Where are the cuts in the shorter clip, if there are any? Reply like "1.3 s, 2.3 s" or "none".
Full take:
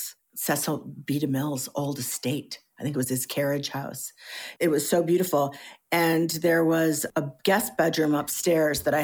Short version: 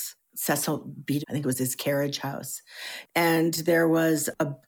1.2 s, 3.1 s